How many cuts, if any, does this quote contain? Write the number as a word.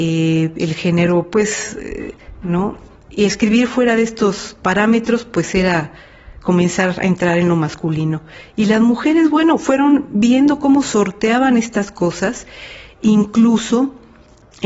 one